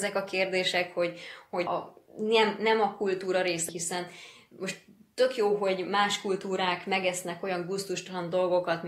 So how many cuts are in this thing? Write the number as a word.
two